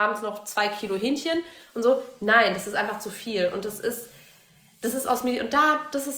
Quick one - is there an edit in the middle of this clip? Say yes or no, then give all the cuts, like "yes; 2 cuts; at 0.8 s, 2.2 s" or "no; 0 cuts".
no; 0 cuts